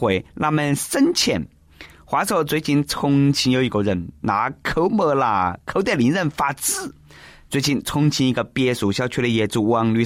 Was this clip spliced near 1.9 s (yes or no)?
no